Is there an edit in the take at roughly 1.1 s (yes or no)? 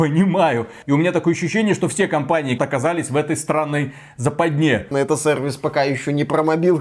no